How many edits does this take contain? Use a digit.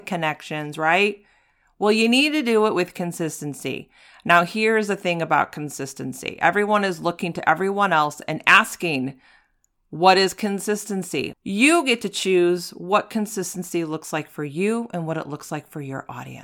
1